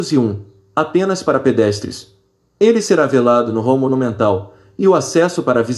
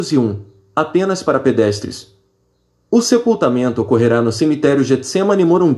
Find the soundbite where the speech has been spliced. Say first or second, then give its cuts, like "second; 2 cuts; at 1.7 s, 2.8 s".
first; 1 cut; at 2.4 s